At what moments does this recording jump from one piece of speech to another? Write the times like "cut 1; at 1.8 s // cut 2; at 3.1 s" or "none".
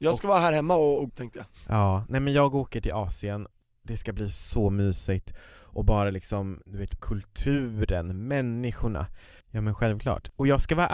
cut 1; at 1.1 s // cut 2; at 7.0 s // cut 3; at 9.4 s